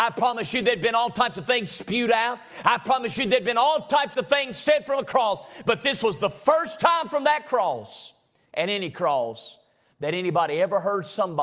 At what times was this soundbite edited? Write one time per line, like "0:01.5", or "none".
none